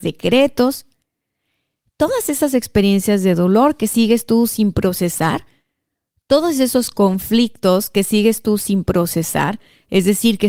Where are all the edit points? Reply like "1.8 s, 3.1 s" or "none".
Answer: none